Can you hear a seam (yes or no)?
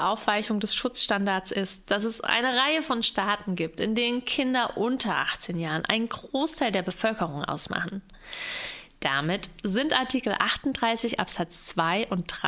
yes